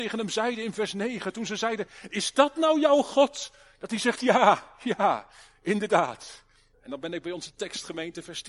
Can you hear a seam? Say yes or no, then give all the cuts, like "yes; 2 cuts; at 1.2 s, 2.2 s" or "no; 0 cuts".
yes; 1 cut; at 6.7 s